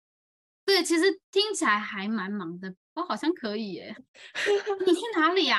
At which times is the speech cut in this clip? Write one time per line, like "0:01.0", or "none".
0:02.7
0:03.9